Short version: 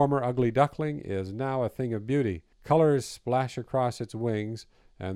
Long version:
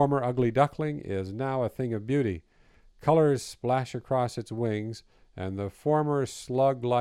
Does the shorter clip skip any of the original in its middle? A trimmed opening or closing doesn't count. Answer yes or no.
yes